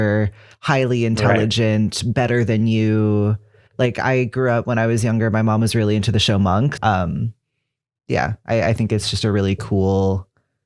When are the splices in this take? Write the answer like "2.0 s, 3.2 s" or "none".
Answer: 6.8 s